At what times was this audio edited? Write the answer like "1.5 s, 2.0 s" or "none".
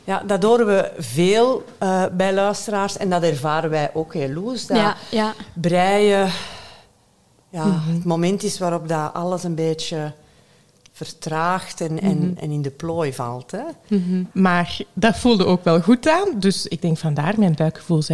14.3 s